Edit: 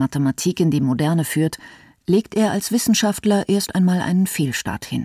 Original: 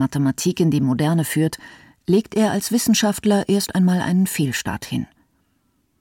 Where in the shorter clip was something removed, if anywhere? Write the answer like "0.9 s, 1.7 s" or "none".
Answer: none